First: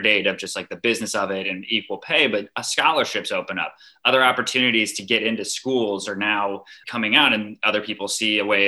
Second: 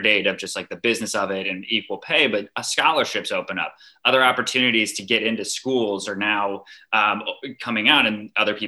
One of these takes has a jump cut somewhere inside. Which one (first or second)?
first